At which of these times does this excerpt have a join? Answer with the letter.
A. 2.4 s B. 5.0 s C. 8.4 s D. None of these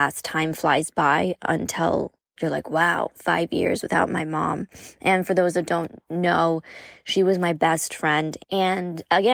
C